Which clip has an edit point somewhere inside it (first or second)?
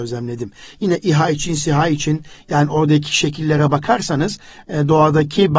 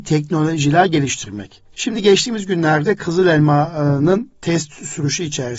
second